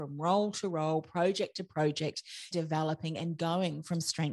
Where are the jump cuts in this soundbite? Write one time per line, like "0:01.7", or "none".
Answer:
0:02.5

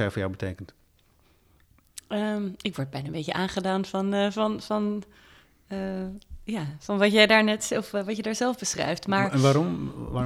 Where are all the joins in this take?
none

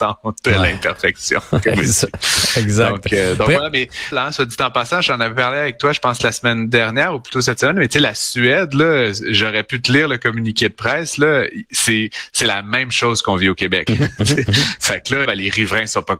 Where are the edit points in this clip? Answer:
0:04.1
0:13.9
0:15.2

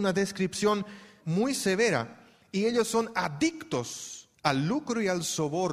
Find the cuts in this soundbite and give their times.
0:01.2
0:04.3

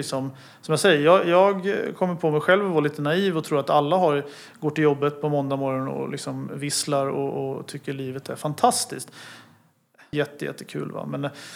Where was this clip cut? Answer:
0:10.1

